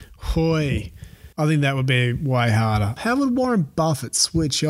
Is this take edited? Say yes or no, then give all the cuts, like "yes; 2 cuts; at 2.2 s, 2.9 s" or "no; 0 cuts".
yes; 2 cuts; at 1.3 s, 3.0 s